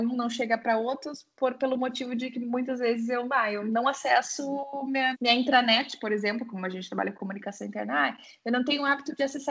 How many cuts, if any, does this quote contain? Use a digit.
1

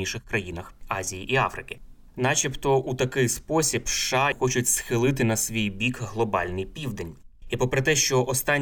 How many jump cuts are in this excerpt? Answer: 2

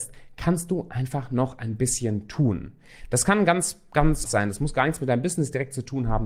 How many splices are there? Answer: 1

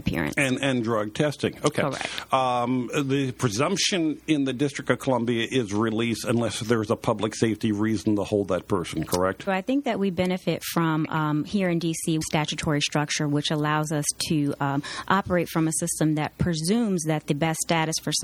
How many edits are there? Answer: 2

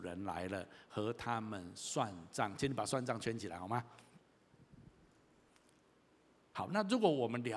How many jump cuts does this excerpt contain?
1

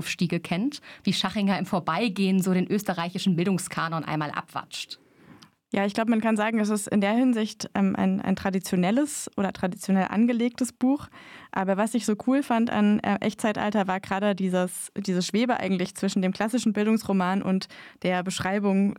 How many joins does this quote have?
1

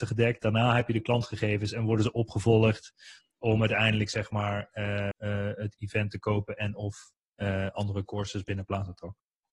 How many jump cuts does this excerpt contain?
1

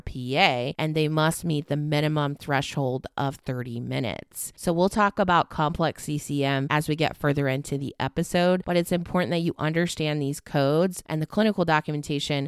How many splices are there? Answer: 1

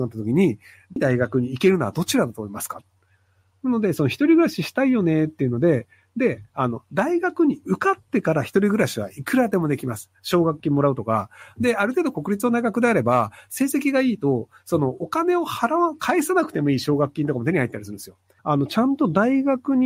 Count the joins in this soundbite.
2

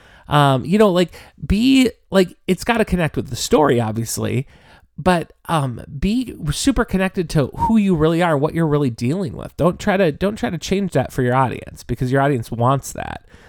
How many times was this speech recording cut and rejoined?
0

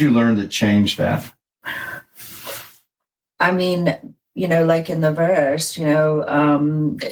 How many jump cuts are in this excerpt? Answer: 0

